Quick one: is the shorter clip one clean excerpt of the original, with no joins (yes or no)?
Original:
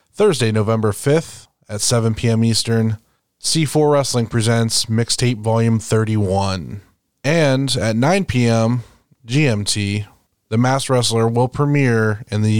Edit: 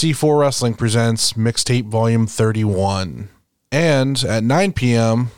yes